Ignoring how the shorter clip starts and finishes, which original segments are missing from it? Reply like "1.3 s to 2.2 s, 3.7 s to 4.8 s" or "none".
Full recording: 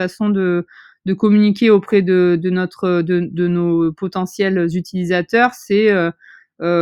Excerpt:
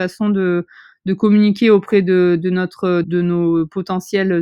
3.0 s to 3.3 s